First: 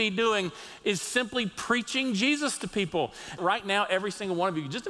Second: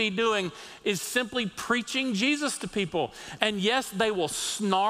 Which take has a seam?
first; 1 cut; at 3.4 s

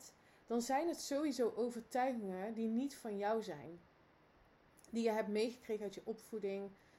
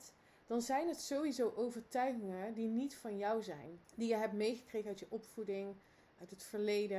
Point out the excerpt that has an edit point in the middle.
second; 1 cut; at 3.8 s

